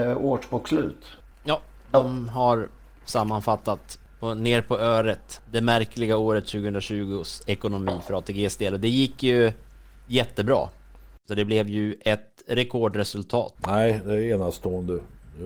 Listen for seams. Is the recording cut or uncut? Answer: cut